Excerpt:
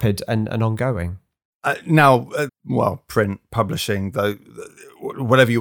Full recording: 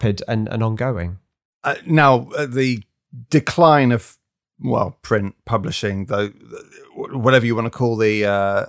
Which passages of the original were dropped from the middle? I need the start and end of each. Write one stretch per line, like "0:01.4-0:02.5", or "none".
0:02.5-0:04.4